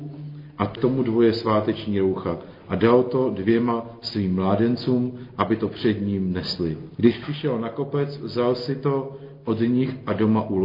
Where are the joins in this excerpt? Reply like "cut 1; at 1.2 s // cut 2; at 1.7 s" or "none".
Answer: none